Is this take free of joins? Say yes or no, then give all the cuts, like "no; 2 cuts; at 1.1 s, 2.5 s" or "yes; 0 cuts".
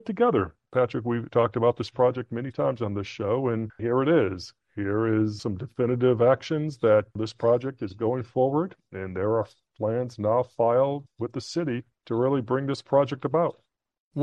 yes; 0 cuts